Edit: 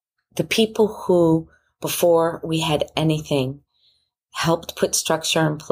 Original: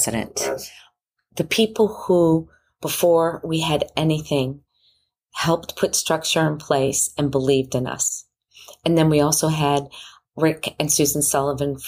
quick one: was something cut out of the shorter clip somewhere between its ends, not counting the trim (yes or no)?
no